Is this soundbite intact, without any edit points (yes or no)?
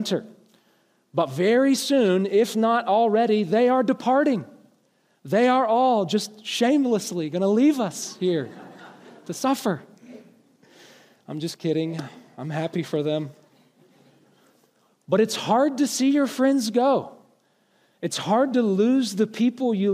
yes